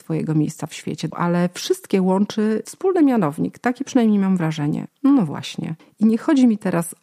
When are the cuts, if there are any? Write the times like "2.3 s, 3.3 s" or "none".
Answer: 1.1 s, 4.9 s